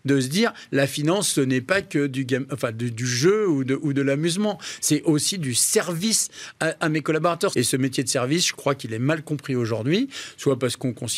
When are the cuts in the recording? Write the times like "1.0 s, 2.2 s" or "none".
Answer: 7.5 s

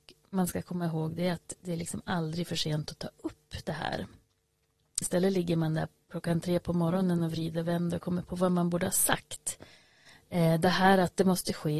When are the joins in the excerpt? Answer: 5.0 s

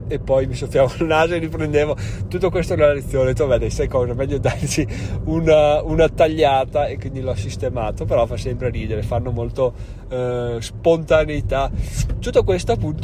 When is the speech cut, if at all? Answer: none

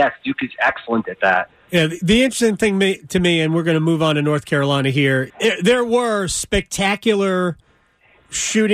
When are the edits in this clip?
1.7 s, 5.3 s

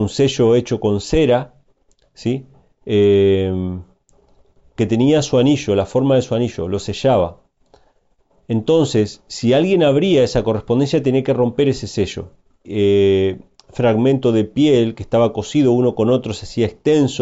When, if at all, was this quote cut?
12.6 s

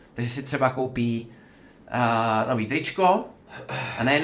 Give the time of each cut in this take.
none

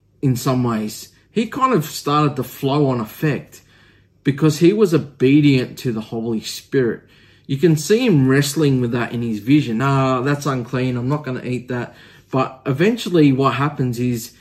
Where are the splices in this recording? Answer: none

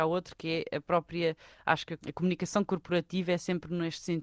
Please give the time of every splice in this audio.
2.0 s

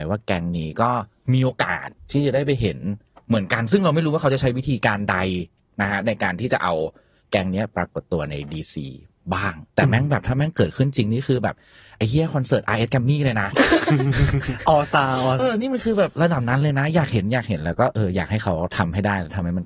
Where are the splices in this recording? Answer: 7.7 s, 9.7 s, 15.4 s

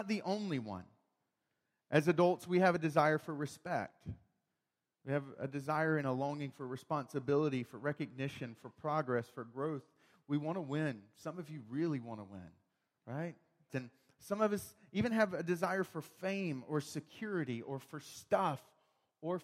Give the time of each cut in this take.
13.7 s

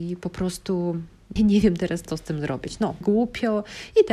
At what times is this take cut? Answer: 1.4 s, 3.0 s

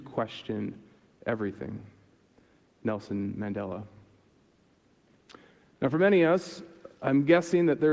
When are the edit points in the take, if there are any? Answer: none

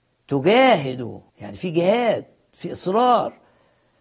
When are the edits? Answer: 1.3 s

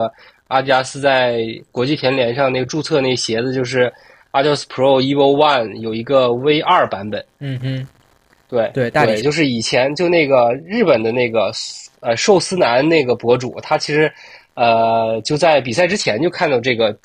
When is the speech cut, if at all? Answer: 7.3 s, 9.2 s

